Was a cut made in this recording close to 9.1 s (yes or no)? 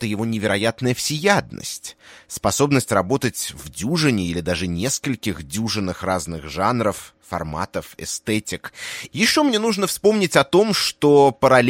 yes